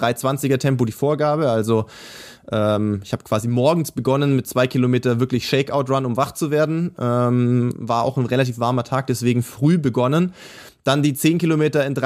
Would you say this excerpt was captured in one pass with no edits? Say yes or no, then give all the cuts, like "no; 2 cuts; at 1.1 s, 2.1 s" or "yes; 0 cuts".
yes; 0 cuts